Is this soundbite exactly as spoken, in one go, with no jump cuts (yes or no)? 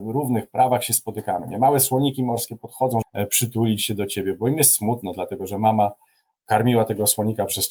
no